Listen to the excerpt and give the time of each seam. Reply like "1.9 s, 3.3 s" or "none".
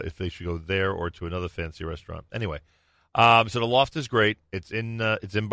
none